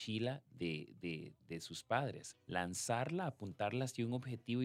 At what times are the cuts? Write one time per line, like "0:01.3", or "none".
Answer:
0:02.3